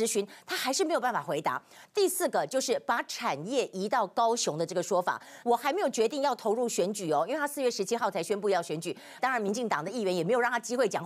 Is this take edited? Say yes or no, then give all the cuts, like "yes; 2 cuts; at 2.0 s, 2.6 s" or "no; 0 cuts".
yes; 2 cuts; at 5.4 s, 9.2 s